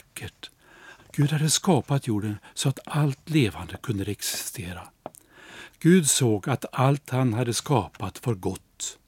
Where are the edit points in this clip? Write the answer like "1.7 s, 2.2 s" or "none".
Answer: 1.0 s, 5.7 s